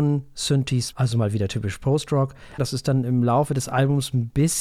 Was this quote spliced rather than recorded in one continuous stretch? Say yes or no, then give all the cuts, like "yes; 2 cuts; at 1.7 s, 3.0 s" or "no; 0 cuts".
yes; 2 cuts; at 0.9 s, 2.6 s